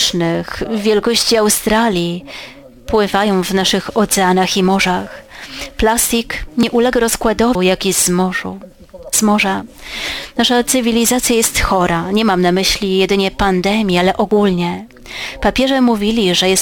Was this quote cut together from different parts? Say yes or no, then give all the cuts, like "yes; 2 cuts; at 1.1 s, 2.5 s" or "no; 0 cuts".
yes; 1 cut; at 7.6 s